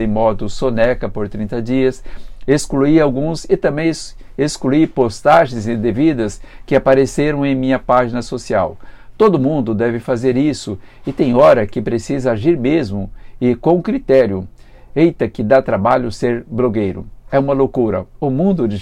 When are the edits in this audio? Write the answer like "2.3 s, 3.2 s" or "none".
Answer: none